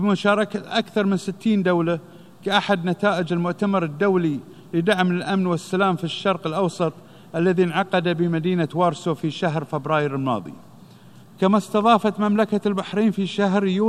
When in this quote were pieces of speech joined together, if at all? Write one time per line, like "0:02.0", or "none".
0:11.2